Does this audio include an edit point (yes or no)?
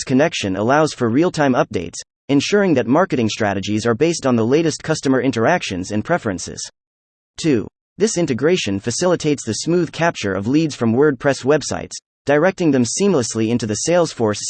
yes